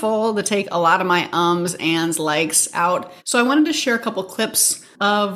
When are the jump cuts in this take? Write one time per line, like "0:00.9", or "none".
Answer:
0:03.2